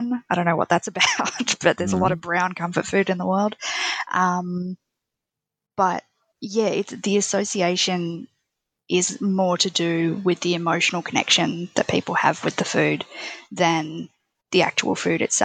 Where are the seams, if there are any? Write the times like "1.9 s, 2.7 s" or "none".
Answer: none